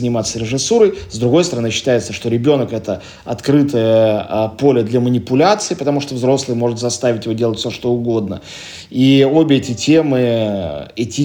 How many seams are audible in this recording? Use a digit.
0